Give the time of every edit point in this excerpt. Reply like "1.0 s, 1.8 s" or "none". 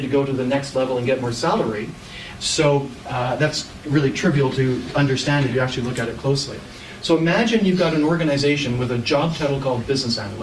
2.4 s